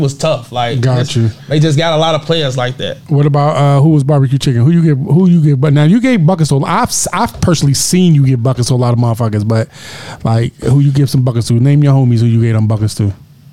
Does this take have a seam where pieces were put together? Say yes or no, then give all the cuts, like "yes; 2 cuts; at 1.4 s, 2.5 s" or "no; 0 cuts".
no; 0 cuts